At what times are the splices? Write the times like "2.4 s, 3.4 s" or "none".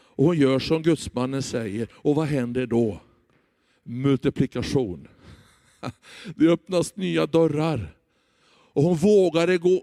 none